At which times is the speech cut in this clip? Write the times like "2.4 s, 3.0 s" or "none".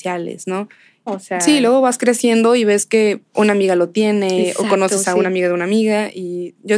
1.1 s